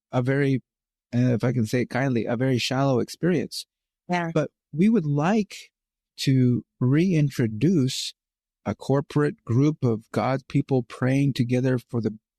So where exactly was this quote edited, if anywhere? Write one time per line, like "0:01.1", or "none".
0:06.1

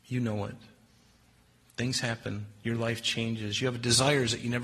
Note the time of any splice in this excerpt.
none

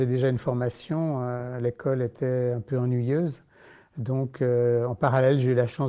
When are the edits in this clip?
none

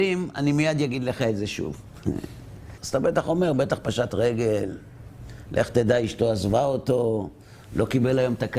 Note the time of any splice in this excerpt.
0:02.8

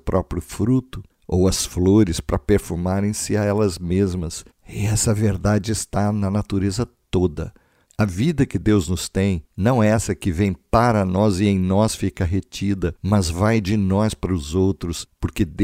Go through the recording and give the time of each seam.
none

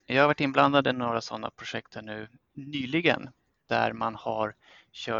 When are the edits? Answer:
none

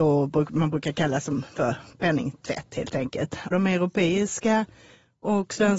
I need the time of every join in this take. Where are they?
0:03.5

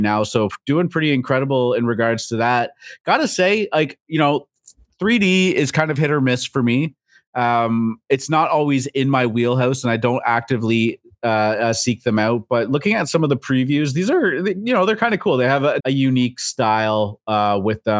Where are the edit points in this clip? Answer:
0:15.8

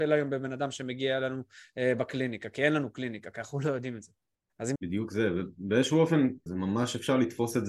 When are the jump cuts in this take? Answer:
0:04.8
0:06.5

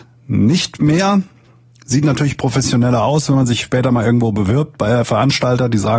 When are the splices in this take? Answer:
none

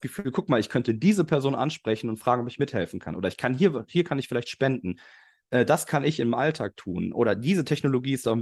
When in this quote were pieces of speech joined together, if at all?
none

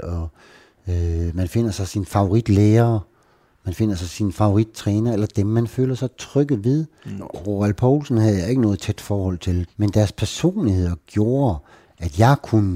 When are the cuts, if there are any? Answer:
0:07.2
0:09.7

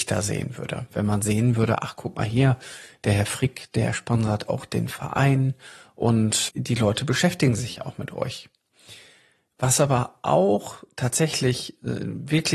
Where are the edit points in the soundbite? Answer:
0:06.5

